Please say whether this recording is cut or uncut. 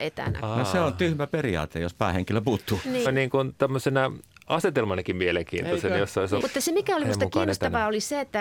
cut